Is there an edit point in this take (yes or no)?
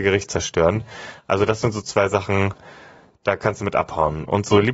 no